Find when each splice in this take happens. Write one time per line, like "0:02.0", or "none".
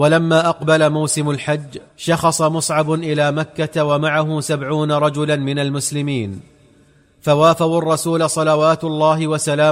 0:01.9